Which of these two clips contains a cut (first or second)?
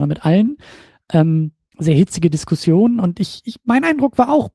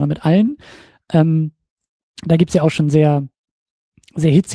first